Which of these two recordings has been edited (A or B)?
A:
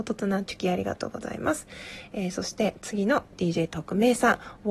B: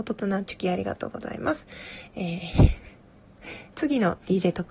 B